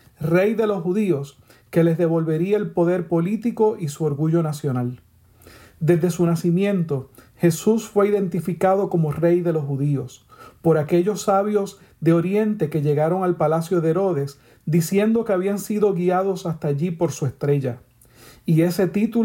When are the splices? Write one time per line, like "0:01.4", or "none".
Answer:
none